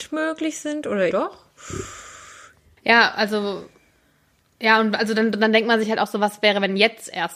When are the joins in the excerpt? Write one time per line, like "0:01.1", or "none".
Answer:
0:01.1